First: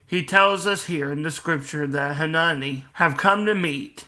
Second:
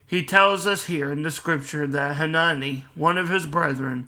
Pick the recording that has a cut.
first; 1 cut; at 2.9 s

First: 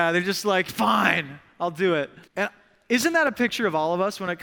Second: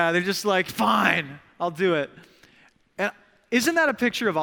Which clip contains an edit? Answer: first; 1 cut; at 2.3 s

